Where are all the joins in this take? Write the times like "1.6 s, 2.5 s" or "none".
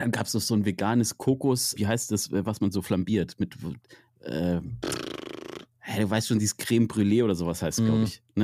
1.8 s